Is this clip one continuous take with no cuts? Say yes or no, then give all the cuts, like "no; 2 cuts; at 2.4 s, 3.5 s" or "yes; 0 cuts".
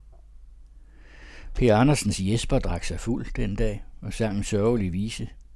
yes; 0 cuts